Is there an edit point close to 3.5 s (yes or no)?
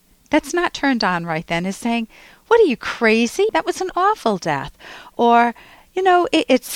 yes